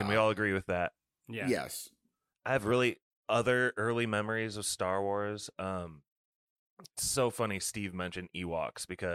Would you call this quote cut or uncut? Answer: cut